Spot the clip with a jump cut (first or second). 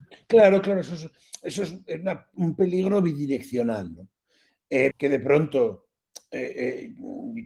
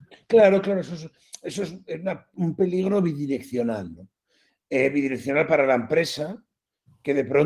first